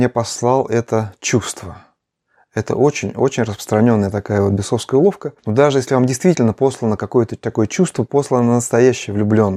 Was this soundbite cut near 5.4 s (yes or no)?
yes